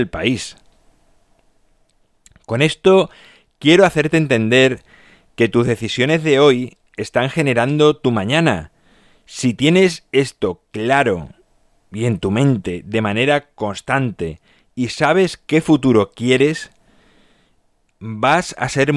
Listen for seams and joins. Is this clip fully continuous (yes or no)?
yes